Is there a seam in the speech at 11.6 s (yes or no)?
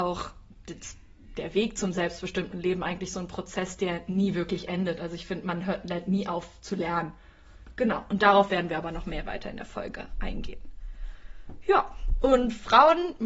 no